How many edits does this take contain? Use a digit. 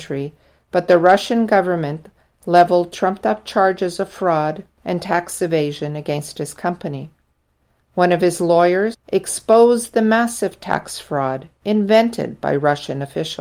1